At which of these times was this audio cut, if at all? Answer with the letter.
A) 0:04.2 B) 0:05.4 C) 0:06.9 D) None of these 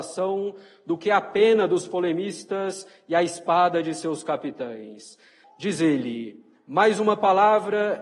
B